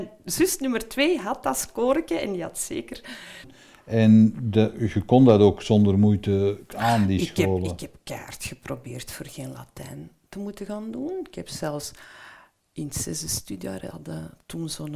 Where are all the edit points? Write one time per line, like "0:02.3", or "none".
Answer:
0:03.4